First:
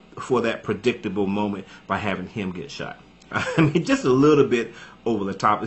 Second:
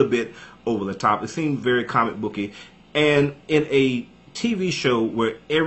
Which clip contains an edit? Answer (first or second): first